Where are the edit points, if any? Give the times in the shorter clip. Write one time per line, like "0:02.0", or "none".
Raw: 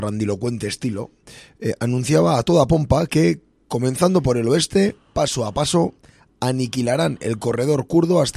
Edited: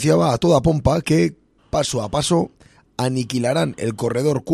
0:01.6